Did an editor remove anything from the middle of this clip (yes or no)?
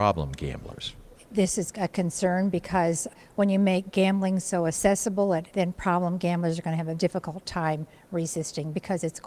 yes